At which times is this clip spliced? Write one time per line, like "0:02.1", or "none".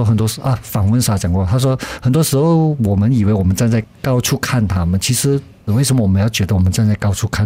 0:05.7